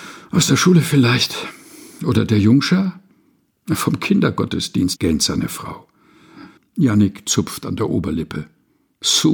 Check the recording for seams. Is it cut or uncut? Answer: cut